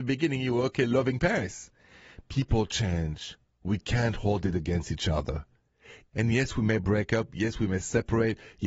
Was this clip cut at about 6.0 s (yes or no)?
no